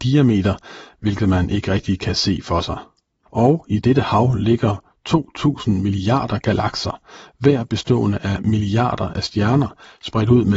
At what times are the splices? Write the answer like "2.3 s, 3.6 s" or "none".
3.3 s